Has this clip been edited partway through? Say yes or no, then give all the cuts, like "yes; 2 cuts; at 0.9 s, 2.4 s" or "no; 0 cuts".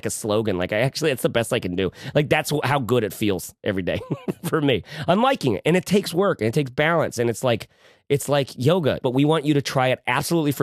yes; 1 cut; at 9.0 s